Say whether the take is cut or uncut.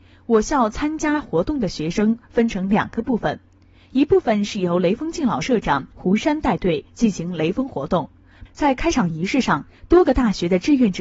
cut